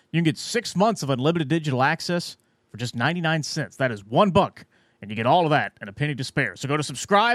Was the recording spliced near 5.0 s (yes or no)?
no